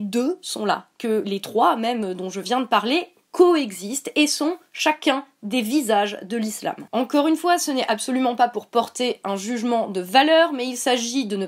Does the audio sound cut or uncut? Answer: uncut